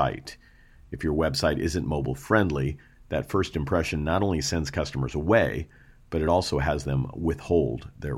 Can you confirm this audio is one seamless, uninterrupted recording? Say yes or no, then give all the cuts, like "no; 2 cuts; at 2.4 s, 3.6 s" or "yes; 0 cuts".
yes; 0 cuts